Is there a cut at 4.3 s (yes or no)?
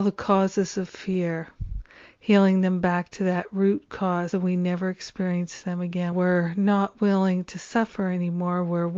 yes